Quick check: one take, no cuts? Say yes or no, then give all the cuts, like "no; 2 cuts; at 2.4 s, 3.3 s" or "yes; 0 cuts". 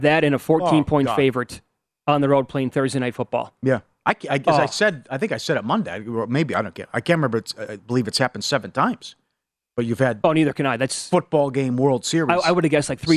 yes; 0 cuts